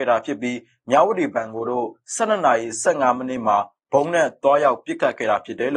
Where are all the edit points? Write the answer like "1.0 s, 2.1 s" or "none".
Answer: none